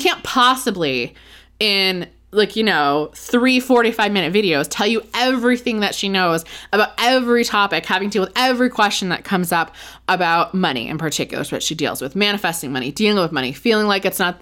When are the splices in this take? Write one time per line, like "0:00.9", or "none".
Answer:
none